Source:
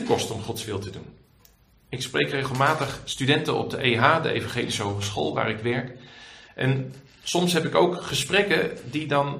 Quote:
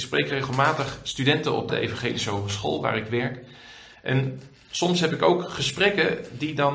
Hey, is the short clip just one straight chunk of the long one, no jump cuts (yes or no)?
no